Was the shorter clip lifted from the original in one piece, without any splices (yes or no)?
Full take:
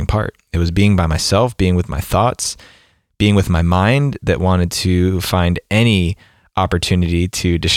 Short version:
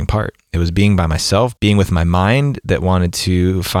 no